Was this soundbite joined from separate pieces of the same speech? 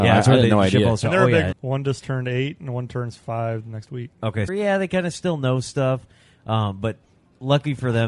yes; 2 cuts; at 1.5 s, 4.5 s

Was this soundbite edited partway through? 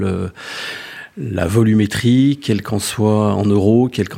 no; 0 cuts

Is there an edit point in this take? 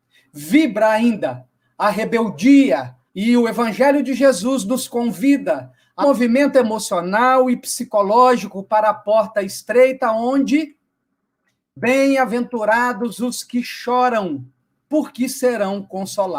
yes; 3 cuts; at 3.1 s, 6.0 s, 14.8 s

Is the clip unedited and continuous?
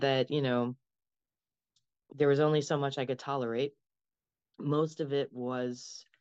yes; 0 cuts

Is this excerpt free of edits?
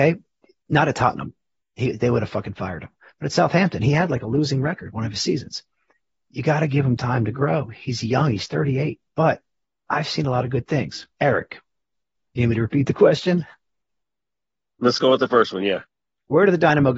no; 2 cuts; at 6.1 s, 11.1 s

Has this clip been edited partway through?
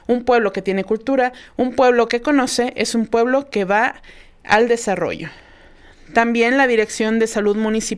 no; 0 cuts

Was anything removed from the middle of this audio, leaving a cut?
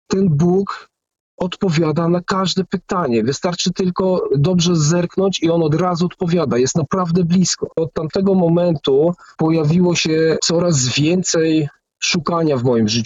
yes; 1 cut; at 7.7 s

